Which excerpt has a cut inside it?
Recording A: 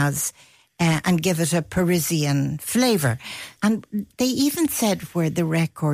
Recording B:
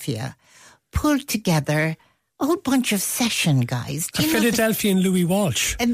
A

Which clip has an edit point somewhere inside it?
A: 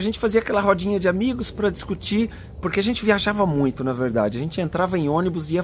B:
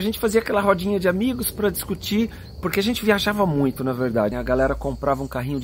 B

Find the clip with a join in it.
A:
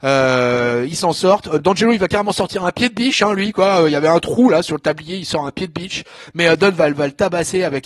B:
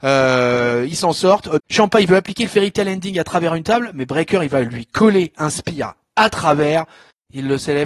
B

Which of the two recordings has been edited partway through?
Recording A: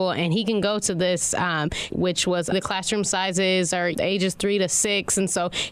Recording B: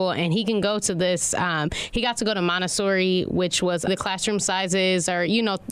A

